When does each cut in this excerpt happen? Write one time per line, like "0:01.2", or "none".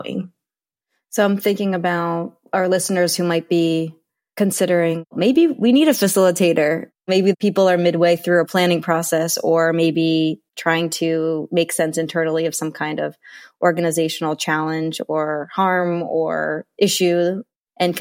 0:10.5

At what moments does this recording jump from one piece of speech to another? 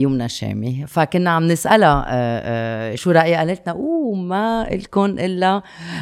0:03.0

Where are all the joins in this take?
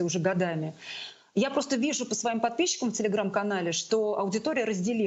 none

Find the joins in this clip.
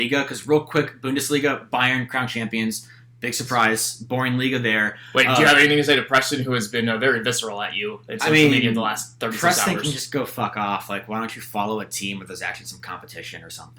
none

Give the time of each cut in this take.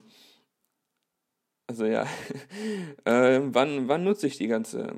none

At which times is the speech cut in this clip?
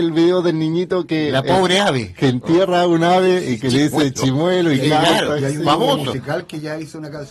none

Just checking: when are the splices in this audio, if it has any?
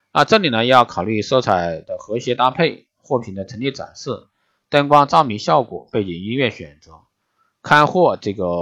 none

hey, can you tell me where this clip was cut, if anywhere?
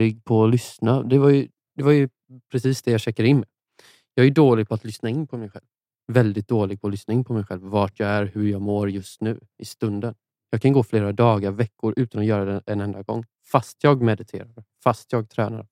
none

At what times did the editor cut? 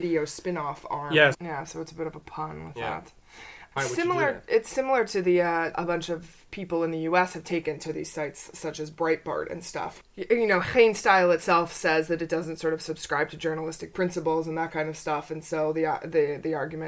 0:01.3
0:03.8
0:05.7

